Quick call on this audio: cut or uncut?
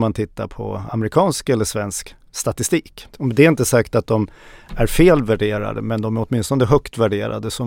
cut